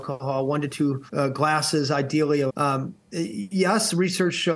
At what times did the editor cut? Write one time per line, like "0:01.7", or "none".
0:01.1
0:02.5